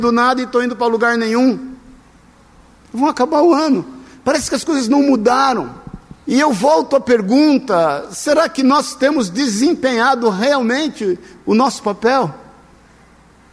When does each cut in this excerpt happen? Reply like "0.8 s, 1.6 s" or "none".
2.8 s, 6.2 s